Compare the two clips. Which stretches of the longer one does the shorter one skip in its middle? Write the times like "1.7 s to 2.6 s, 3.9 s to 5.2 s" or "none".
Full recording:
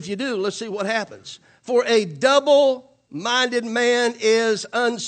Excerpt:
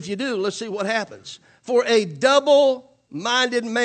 none